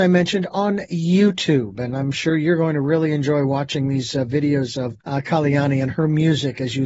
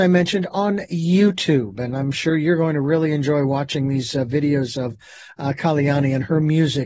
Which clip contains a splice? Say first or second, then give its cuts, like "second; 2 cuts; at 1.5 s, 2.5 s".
first; 1 cut; at 5.0 s